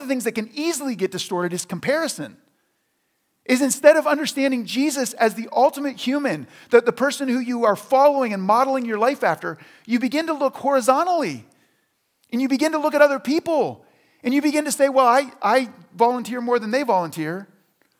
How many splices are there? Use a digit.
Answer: 0